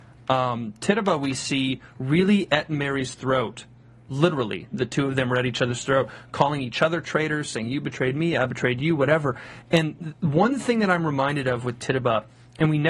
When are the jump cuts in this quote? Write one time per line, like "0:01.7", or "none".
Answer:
0:10.2

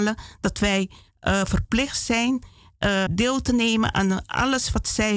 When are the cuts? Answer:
0:03.1

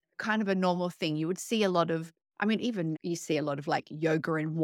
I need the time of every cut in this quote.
0:02.9

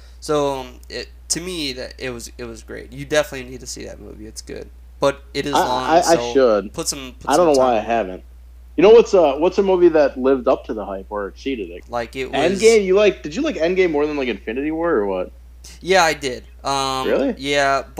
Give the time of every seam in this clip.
0:11.8

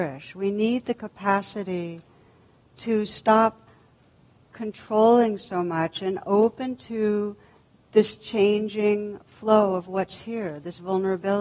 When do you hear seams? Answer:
none

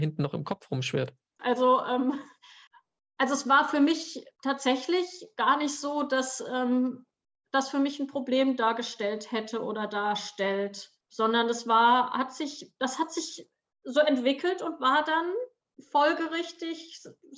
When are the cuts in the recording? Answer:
0:01.4
0:11.0

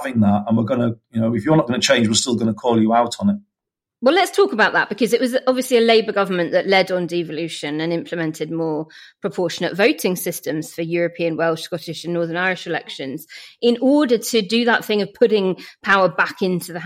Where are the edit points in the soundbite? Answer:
none

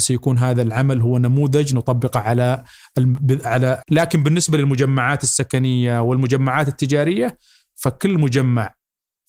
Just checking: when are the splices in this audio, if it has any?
0:03.8

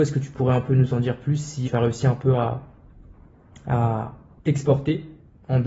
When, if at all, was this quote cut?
0:01.6

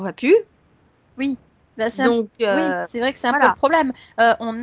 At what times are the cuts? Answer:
none

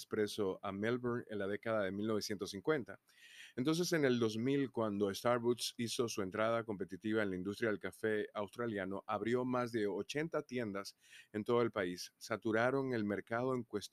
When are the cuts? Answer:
none

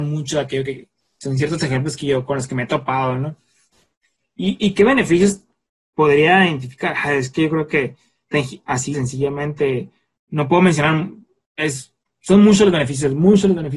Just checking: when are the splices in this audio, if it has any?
0:08.9

